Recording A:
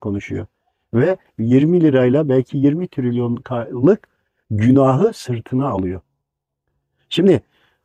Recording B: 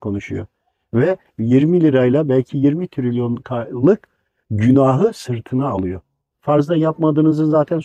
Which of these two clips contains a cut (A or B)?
B